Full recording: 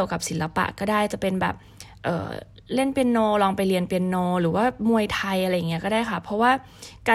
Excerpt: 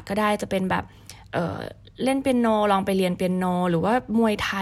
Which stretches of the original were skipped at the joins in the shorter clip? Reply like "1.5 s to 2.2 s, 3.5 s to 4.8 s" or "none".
none

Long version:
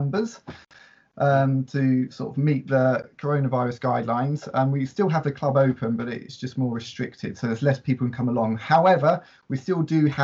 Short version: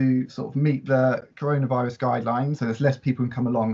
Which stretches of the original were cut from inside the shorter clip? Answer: 4.4 s to 7.4 s

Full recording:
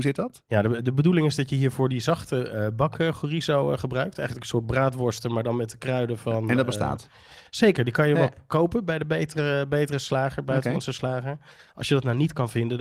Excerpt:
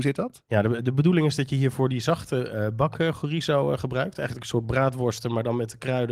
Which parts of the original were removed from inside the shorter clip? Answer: none

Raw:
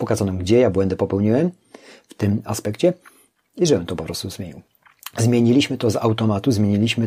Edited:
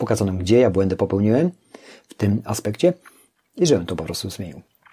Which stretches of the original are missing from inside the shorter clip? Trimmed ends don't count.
none

